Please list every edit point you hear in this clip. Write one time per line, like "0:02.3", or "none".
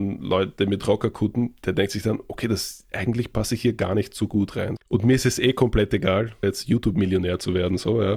0:04.8
0:06.4